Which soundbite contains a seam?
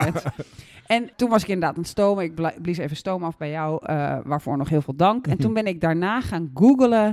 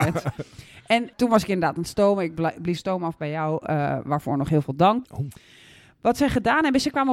second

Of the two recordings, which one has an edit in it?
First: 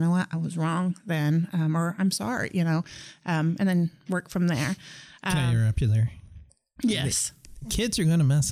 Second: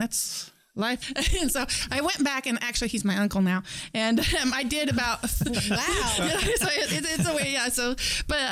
second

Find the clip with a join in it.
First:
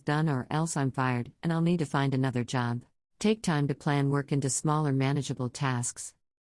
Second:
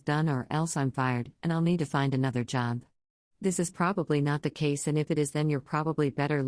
first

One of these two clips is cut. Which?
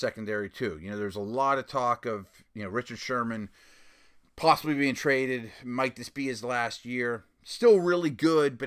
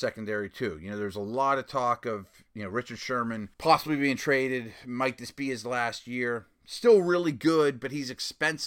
second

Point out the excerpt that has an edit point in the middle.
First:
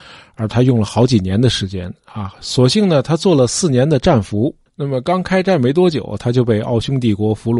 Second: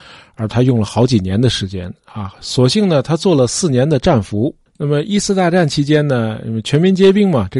first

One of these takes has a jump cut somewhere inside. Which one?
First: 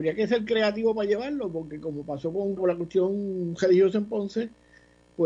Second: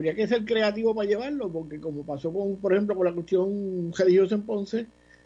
first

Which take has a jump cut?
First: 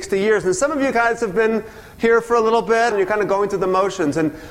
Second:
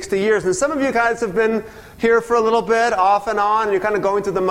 first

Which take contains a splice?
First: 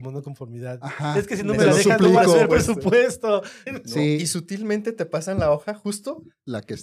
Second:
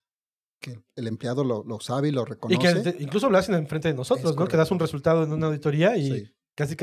first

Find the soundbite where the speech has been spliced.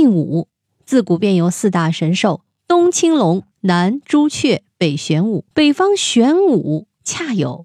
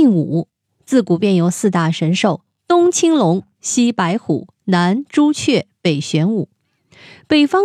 first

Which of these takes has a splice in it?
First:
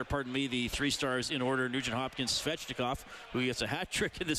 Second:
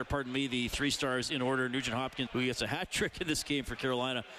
second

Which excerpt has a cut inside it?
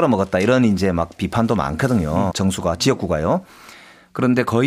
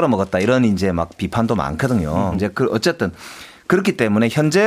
first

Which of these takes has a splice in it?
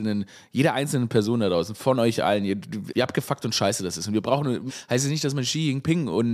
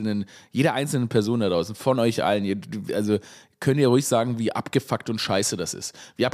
first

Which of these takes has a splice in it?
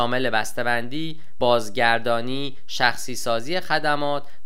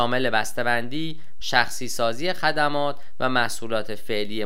second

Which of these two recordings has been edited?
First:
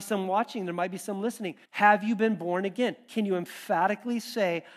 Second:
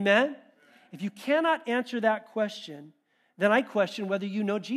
first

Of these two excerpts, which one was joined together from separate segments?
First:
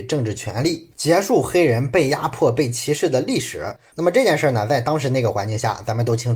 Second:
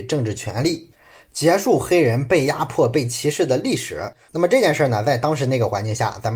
first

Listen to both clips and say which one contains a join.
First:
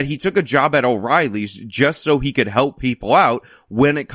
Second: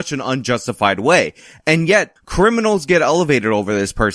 second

